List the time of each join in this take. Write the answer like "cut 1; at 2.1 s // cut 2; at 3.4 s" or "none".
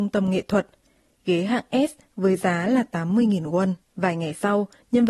cut 1; at 3.8 s

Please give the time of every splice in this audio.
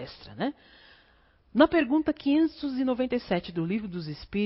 none

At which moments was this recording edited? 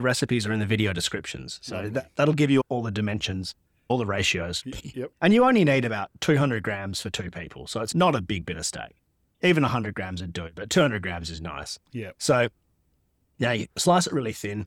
cut 1; at 5.1 s

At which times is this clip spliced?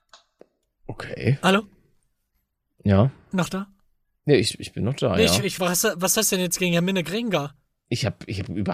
cut 1; at 5.6 s

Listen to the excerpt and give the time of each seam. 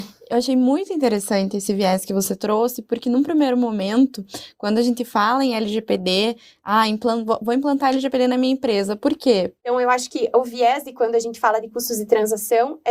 cut 1; at 9.6 s

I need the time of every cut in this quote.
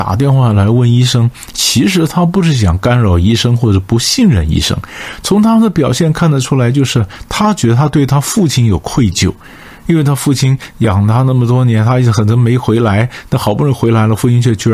none

